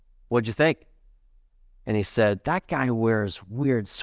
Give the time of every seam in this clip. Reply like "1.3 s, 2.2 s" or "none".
none